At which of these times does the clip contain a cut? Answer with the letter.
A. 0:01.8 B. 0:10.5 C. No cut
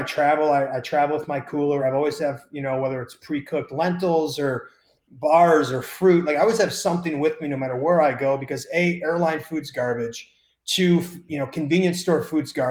C